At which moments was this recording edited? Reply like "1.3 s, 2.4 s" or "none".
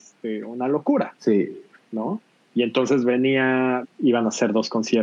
3.8 s